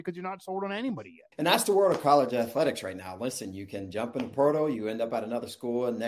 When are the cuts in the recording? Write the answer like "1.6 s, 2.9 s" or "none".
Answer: 1.3 s